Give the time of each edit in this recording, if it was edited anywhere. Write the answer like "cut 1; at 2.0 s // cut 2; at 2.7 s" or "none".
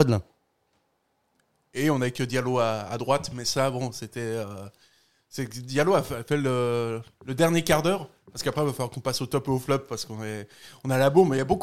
none